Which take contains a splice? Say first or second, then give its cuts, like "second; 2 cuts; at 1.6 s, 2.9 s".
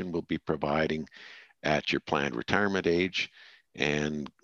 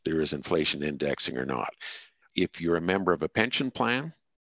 second; 1 cut; at 2.2 s